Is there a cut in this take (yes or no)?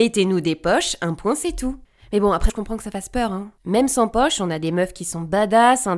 yes